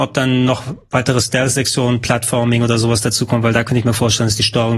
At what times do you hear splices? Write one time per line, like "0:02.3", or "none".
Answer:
none